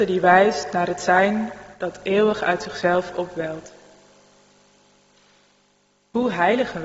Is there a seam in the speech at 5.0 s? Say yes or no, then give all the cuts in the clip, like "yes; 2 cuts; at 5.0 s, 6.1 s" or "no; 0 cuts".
no; 0 cuts